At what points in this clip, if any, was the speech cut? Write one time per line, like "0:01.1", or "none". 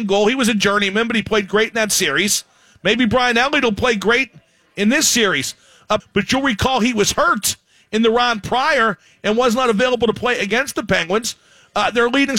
0:06.0

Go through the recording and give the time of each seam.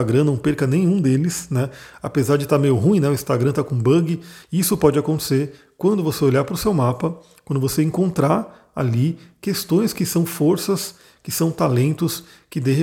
0:04.4

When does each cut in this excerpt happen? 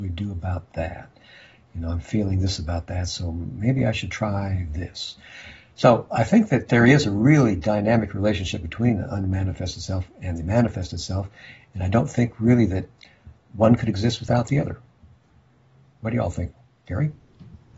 none

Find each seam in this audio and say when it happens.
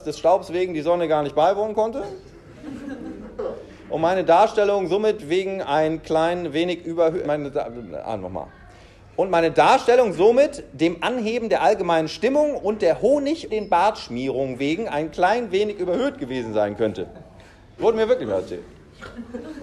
0:07.2
0:13.5
0:17.8

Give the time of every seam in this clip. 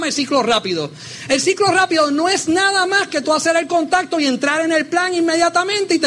none

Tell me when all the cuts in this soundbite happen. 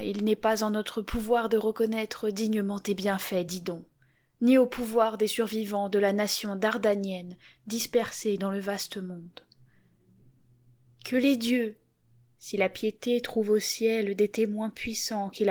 none

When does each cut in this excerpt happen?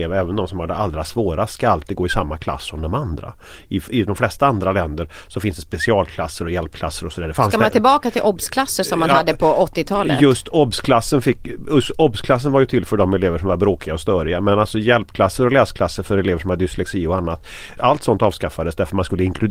0:17.8

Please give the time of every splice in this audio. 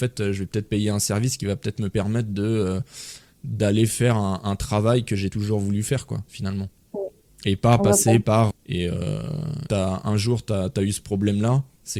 0:08.5
0:09.7

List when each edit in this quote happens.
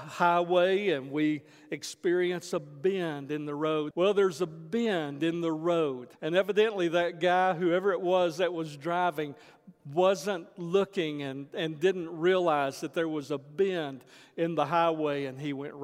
0:03.9
0:06.2

